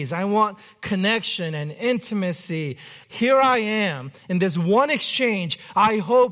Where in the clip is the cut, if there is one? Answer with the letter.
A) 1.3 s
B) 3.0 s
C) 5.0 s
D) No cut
B